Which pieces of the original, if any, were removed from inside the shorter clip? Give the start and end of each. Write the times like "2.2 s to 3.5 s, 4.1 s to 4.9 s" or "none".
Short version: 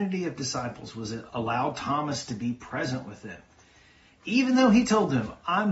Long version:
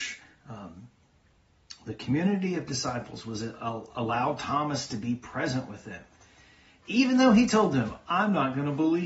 3.6 s to 3.9 s